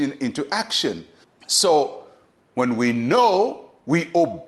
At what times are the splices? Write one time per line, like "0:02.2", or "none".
0:01.2